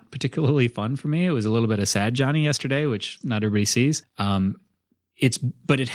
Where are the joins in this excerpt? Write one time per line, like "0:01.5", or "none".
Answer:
0:04.0